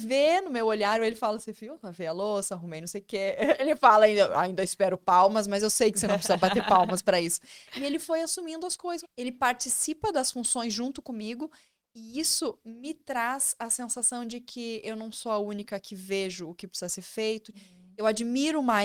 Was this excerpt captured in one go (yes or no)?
no